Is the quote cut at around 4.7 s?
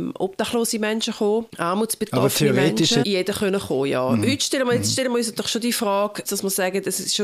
no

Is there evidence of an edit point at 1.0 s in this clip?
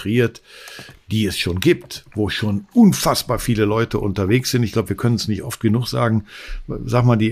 no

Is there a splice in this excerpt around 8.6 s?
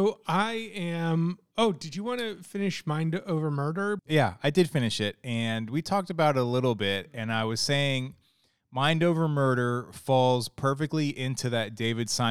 no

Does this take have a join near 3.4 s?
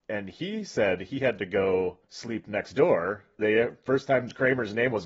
yes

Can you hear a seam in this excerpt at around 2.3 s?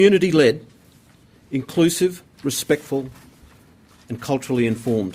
no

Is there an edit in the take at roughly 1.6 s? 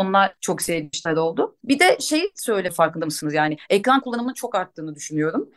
no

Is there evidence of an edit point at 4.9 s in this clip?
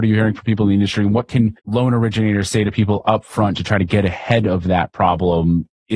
no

